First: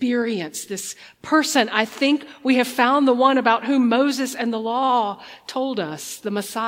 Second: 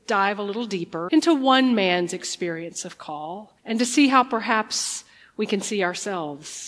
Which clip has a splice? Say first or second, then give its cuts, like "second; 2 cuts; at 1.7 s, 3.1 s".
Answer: second; 2 cuts; at 1.1 s, 3.6 s